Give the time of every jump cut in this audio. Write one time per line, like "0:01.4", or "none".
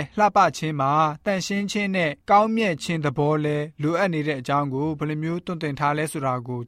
0:02.2